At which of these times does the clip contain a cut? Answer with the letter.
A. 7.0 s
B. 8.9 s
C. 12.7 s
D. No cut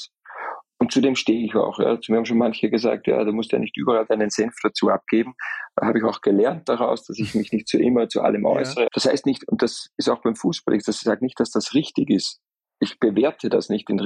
B